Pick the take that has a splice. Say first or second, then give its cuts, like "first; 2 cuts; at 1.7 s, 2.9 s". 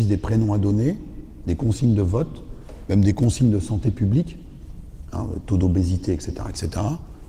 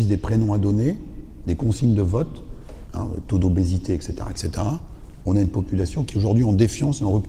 second; 1 cut; at 2.9 s